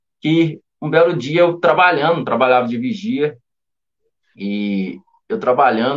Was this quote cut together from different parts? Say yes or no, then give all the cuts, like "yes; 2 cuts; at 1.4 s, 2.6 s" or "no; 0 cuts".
no; 0 cuts